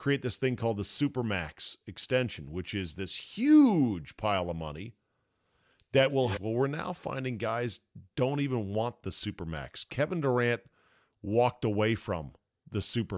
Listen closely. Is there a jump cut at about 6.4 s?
yes; 1 cut; at 6.4 s

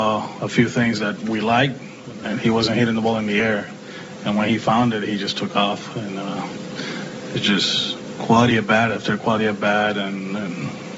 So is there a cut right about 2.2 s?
yes; 1 cut; at 2.2 s

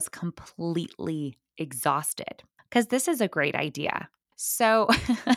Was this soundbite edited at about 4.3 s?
yes; 2 cuts; at 2.6 s, 4.3 s

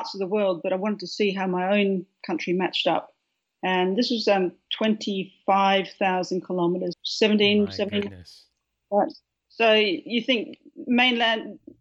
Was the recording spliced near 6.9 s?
yes; 1 cut; at 6.9 s

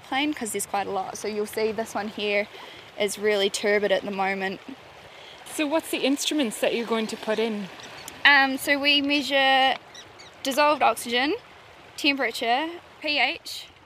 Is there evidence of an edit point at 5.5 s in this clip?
yes; 1 cut; at 5.5 s

